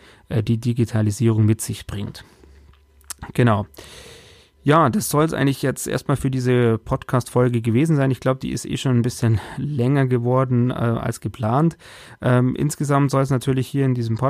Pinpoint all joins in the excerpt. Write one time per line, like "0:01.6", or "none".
none